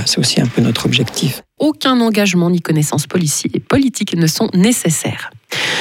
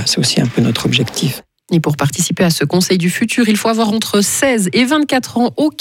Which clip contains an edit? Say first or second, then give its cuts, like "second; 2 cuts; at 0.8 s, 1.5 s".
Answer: first; 1 cut; at 1.6 s